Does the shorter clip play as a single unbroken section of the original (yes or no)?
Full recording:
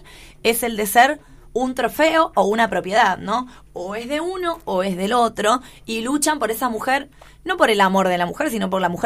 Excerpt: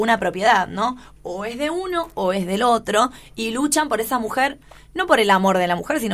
yes